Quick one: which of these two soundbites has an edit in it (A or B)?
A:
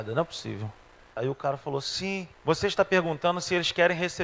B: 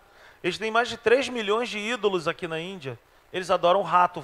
A